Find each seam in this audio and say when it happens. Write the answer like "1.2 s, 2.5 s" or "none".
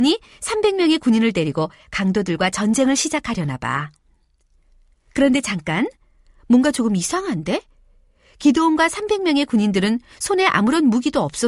none

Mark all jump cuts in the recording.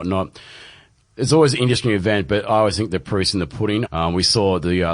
3.8 s

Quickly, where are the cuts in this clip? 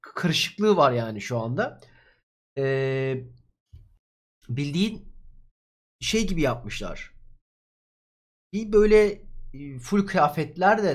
none

